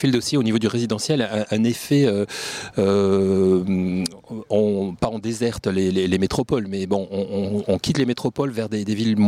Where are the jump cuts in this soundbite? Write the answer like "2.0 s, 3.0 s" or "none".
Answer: none